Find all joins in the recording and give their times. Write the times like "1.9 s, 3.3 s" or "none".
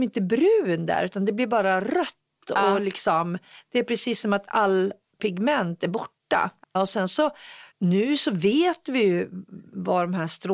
6.6 s, 7.7 s